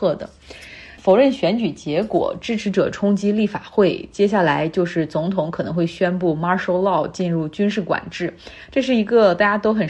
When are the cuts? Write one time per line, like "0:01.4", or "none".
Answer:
none